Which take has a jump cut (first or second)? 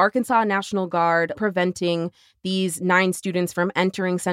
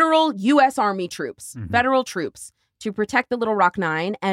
first